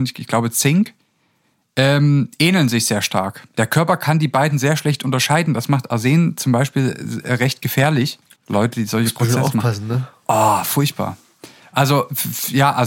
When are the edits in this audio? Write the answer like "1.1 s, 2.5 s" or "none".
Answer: 8.3 s